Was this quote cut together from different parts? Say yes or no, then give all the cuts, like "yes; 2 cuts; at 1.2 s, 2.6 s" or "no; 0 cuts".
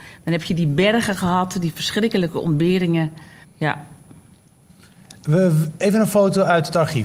yes; 1 cut; at 3.4 s